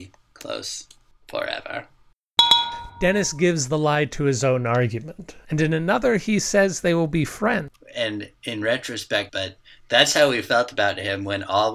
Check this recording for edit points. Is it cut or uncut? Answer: cut